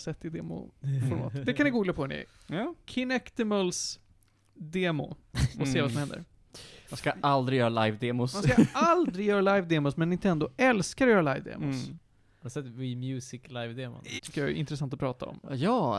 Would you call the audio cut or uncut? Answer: cut